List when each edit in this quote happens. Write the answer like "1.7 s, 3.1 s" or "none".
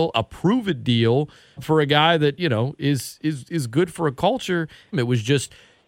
1.6 s, 4.9 s

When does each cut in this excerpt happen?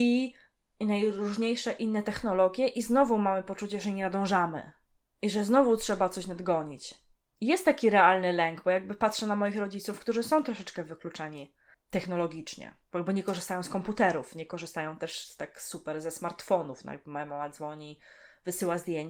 12.8 s

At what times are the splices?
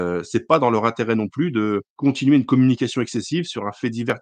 1.9 s

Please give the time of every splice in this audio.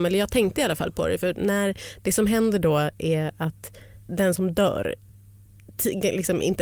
4.1 s

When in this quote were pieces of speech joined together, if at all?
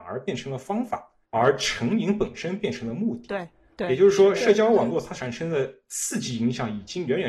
1.2 s

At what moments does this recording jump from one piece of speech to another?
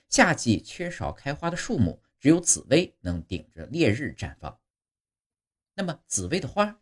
none

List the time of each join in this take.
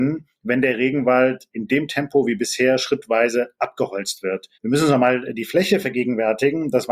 4.6 s

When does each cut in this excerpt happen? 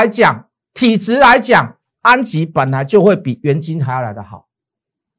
1.9 s

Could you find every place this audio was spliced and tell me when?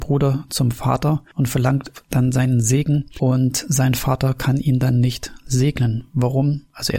none

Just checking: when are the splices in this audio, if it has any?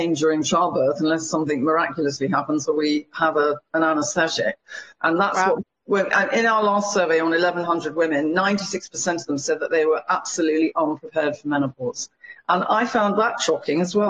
5.0 s

